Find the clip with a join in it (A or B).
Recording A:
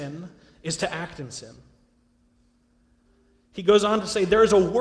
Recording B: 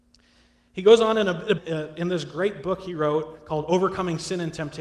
B